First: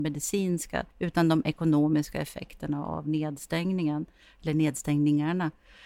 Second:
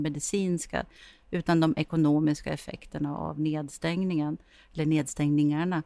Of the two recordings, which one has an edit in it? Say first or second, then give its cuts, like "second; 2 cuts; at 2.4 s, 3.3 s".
first; 1 cut; at 0.9 s